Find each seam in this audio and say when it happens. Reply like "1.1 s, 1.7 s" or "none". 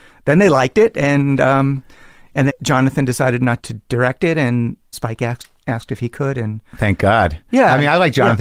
2.5 s, 3.6 s, 4.9 s